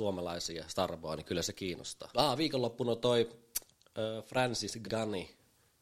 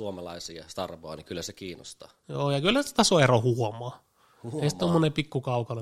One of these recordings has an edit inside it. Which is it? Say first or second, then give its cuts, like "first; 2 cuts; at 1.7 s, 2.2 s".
first; 2 cuts; at 2.1 s, 4.8 s